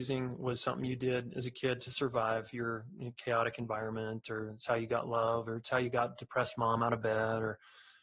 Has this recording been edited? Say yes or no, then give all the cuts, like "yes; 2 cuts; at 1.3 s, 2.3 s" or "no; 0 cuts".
no; 0 cuts